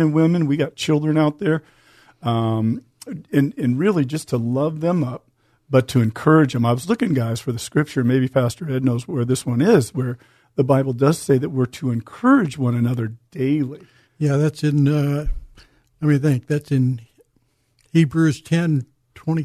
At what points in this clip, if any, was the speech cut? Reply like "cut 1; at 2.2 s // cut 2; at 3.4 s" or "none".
none